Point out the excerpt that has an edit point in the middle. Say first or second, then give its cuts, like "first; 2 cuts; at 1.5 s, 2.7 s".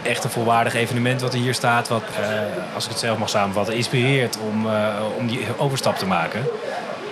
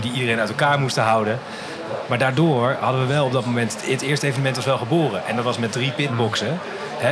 first; 1 cut; at 2.1 s